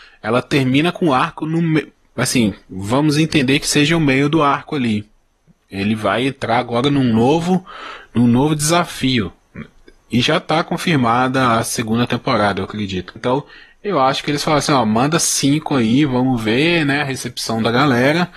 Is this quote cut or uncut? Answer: cut